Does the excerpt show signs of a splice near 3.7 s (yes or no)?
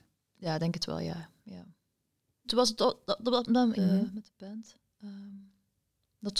yes